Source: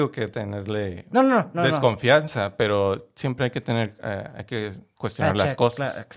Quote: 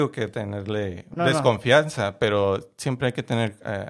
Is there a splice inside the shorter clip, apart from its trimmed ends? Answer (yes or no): yes